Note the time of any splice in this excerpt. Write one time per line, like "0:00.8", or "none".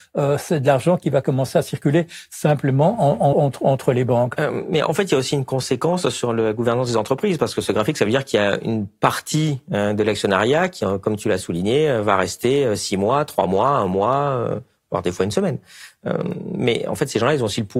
0:03.3